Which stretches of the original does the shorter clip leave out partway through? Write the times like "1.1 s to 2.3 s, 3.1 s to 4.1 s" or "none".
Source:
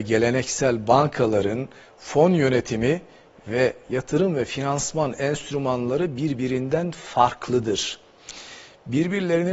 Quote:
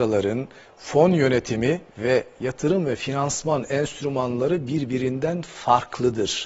3.1 s to 3.4 s